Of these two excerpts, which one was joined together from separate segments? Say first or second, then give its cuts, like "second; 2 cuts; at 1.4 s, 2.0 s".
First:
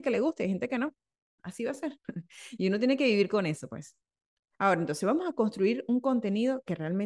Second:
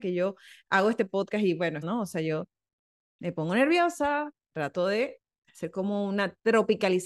second; 2 cuts; at 1.8 s, 4.5 s